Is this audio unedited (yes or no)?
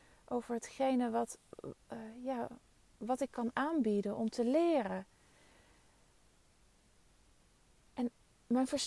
yes